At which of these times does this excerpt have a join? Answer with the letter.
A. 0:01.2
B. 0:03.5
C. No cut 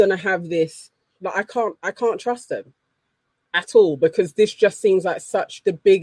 A